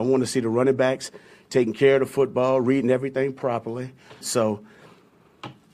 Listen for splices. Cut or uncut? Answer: cut